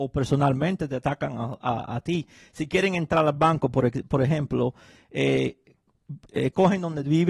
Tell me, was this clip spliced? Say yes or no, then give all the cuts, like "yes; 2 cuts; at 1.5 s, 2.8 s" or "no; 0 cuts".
no; 0 cuts